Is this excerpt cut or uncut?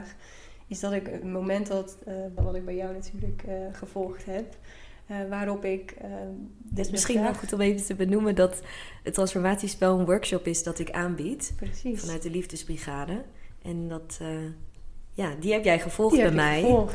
cut